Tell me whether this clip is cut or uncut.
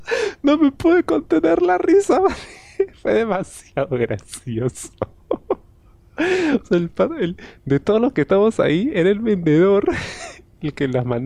uncut